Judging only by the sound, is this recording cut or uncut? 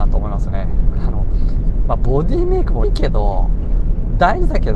cut